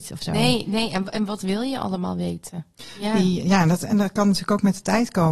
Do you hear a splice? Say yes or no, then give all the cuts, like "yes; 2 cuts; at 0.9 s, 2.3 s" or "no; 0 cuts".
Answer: no; 0 cuts